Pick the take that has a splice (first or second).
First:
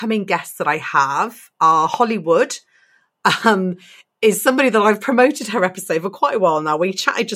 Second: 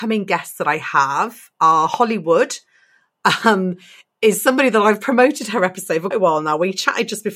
second